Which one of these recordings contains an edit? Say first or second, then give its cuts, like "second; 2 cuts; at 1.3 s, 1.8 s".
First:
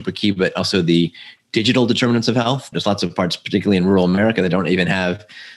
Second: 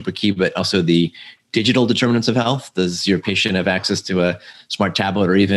first; 1 cut; at 2.7 s